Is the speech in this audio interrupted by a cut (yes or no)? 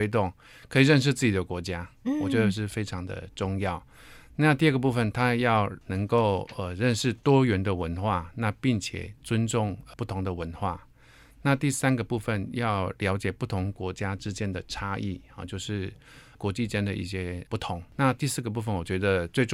no